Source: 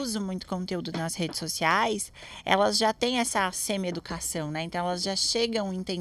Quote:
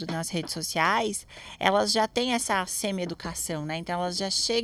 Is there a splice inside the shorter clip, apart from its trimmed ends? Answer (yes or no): no